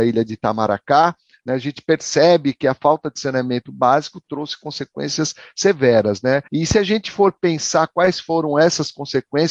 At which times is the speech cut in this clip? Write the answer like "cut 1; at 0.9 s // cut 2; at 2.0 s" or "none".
cut 1; at 6.5 s